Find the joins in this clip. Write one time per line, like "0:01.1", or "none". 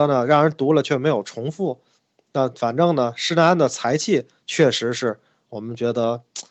none